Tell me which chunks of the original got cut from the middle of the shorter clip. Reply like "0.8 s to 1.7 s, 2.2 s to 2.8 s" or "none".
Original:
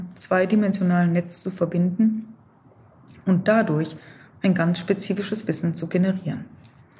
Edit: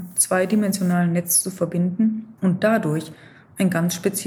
2.4 s to 3.2 s

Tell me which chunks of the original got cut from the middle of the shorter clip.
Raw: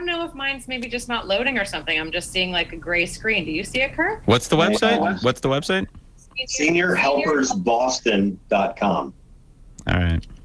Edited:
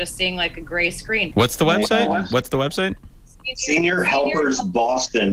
3.5 s to 4.2 s

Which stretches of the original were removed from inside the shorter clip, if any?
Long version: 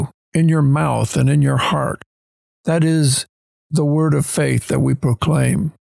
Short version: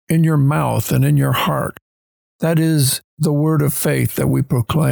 3.3 s to 3.6 s

